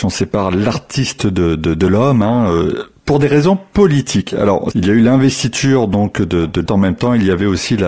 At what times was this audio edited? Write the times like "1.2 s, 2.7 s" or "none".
4.7 s, 6.7 s